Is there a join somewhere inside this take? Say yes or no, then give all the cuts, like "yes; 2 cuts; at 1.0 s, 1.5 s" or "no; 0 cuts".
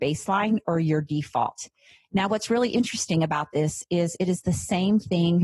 no; 0 cuts